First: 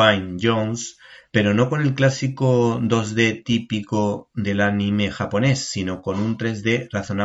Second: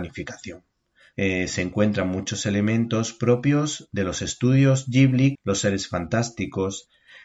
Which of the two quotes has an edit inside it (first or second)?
second